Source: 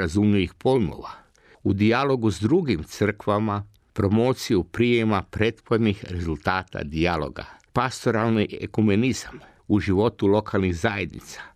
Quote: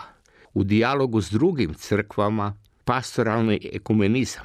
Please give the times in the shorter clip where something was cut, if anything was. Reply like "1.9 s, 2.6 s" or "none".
2.8 s